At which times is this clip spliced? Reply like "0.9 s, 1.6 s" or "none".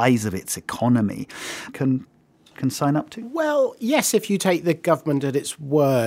1.7 s